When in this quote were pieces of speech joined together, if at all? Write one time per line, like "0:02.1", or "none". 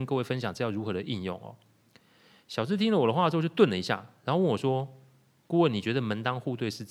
none